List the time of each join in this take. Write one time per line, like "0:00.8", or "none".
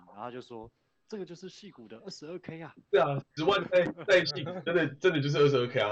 0:02.8